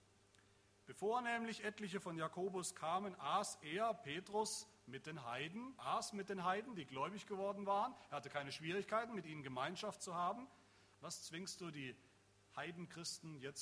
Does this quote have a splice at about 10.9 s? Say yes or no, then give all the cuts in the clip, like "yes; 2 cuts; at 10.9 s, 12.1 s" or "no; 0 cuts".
yes; 2 cuts; at 5.8 s, 10.9 s